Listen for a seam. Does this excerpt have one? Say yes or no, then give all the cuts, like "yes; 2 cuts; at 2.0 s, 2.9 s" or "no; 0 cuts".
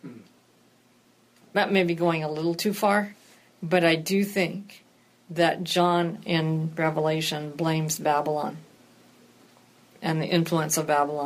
no; 0 cuts